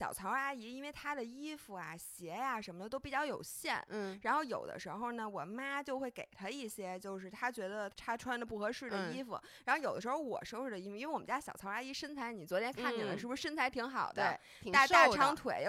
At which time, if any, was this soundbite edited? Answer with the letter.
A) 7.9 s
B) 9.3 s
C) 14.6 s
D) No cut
A